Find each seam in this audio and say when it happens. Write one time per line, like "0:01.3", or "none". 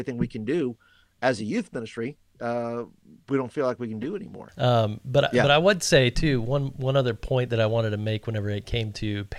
none